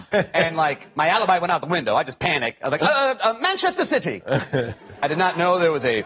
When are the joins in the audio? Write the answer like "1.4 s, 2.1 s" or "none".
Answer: none